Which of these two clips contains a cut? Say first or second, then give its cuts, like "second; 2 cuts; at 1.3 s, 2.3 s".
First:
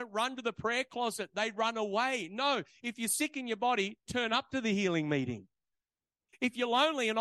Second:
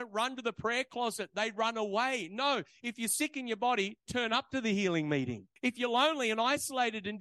second; 1 cut; at 5.6 s